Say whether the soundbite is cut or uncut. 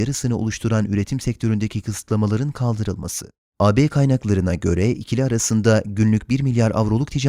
cut